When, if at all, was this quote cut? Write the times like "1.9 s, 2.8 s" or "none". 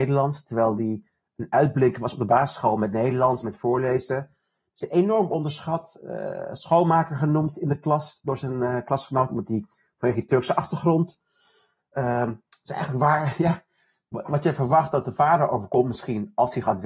3.4 s